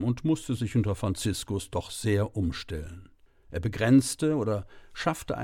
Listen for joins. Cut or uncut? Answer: uncut